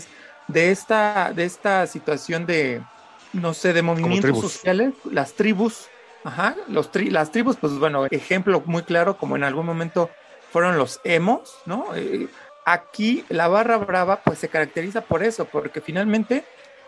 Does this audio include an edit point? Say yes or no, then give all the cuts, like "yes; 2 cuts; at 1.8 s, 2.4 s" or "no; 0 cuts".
yes; 3 cuts; at 3.2 s, 8.1 s, 12.5 s